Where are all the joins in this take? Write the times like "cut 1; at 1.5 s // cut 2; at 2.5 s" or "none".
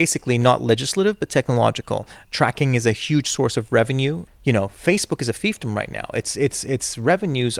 cut 1; at 2.2 s // cut 2; at 4.3 s